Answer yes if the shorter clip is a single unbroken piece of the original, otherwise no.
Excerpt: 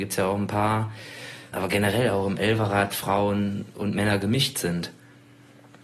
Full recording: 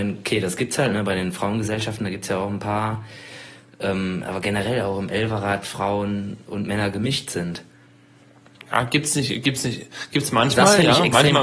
no